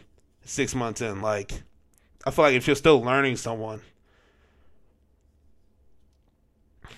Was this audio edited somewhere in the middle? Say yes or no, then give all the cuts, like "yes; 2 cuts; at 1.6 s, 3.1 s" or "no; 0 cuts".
no; 0 cuts